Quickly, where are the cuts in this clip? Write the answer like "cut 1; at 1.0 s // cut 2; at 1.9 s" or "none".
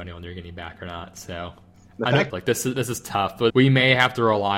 cut 1; at 2.3 s // cut 2; at 3.5 s